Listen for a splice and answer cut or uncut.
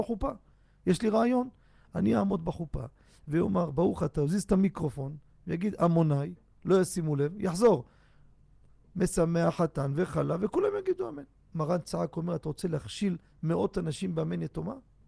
uncut